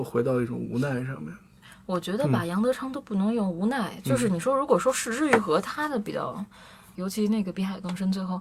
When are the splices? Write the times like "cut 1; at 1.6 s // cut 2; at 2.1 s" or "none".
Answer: cut 1; at 7.0 s